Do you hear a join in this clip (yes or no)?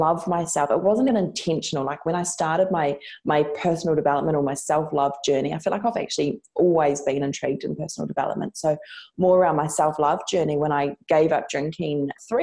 yes